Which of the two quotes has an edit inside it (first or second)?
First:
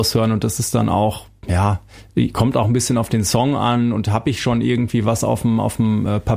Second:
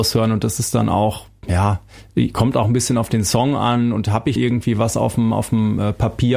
second